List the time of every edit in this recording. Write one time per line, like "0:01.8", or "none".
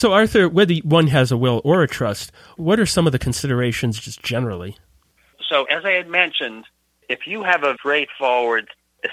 0:05.6
0:07.8

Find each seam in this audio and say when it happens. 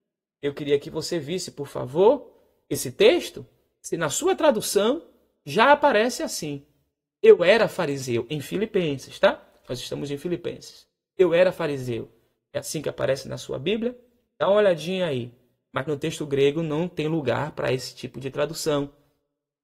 none

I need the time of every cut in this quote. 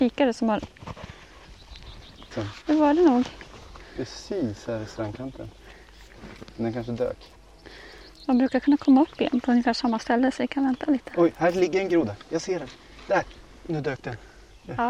0:02.3

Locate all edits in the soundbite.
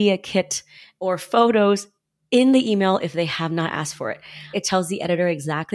0:04.5

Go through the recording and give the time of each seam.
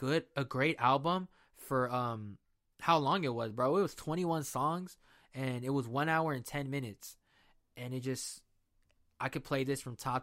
none

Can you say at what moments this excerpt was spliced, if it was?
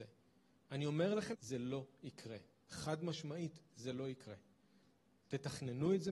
0:01.3

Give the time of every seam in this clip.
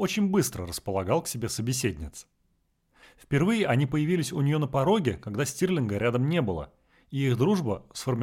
0:03.0

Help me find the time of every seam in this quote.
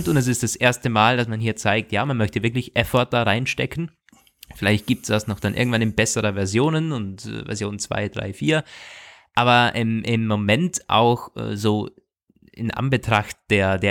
none

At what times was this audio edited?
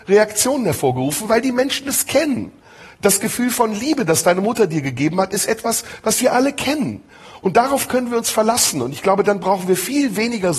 none

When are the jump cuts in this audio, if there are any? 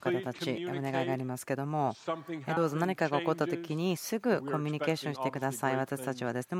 none

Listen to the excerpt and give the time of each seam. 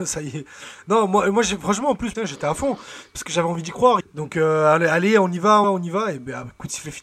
0:02.1
0:04.0
0:05.6

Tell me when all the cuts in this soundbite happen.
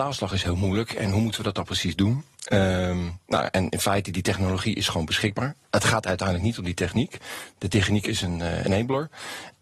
none

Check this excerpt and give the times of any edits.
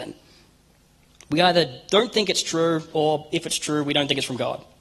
none

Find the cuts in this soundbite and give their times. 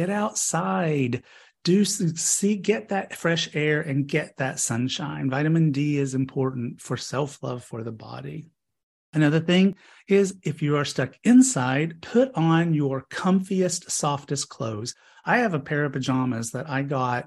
none

